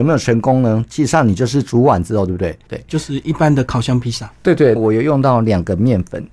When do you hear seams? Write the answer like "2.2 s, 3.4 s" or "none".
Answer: 2.7 s, 4.8 s

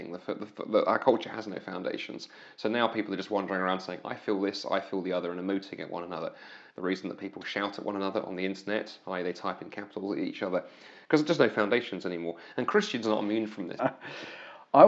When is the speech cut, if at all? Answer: 6.7 s, 13.8 s

